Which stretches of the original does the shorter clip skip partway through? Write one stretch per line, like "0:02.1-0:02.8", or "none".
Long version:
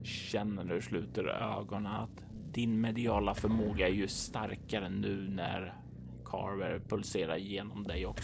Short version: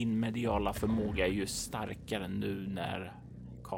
none